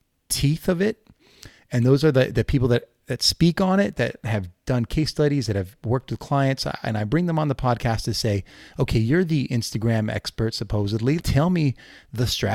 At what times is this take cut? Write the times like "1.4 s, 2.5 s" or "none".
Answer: 11.2 s